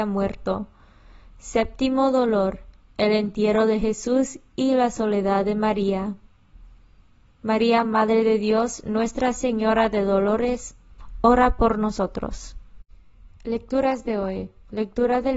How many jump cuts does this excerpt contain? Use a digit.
0